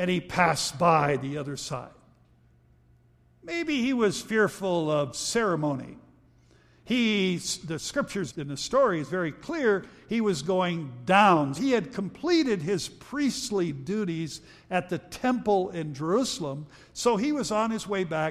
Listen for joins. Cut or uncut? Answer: cut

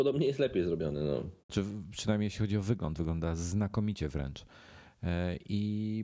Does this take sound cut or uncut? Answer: cut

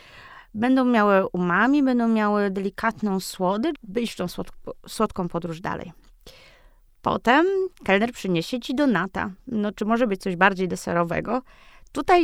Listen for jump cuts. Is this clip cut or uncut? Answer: cut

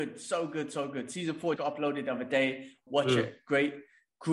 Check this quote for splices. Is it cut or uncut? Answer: cut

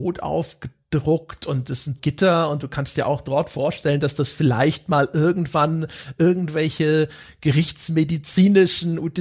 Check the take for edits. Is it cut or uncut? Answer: cut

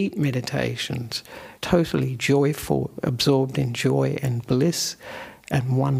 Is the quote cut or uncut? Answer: cut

